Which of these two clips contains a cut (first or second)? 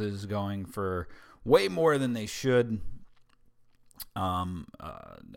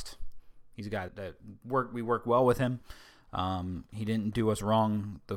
second